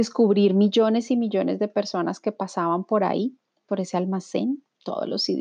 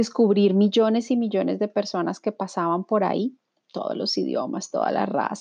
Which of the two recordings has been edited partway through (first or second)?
second